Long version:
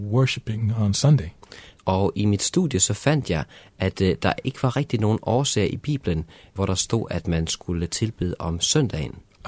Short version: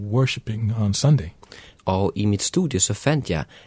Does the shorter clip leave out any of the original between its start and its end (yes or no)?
no